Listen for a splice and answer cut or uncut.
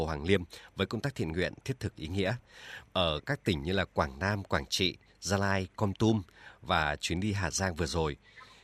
cut